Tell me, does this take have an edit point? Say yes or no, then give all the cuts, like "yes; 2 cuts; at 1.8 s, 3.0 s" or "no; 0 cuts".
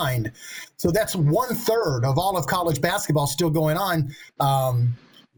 yes; 1 cut; at 4.3 s